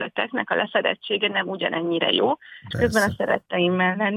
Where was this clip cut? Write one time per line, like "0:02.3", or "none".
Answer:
0:02.7